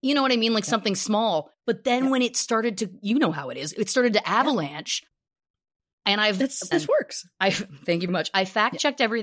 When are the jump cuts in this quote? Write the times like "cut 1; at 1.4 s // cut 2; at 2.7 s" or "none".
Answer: cut 1; at 6.7 s // cut 2; at 8.1 s